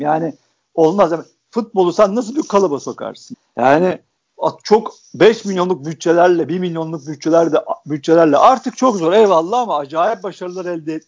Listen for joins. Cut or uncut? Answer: uncut